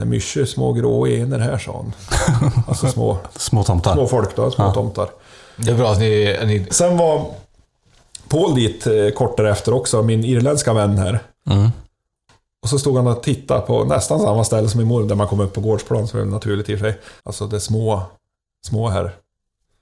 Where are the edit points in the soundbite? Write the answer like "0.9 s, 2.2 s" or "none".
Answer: 6.7 s, 17.2 s